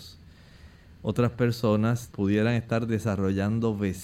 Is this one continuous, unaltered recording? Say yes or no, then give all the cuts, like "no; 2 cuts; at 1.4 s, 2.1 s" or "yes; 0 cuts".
no; 1 cut; at 2.1 s